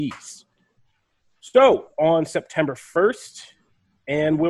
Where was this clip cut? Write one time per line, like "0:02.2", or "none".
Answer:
0:01.9